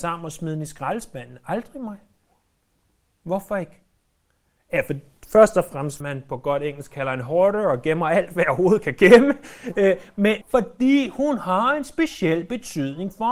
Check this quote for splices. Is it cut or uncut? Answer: cut